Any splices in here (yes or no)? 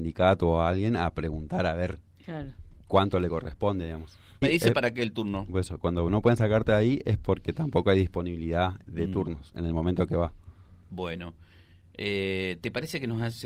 yes